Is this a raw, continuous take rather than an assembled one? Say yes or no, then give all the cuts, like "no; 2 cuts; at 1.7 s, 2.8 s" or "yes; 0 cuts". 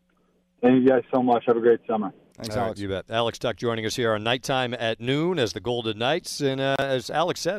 no; 1 cut; at 6.4 s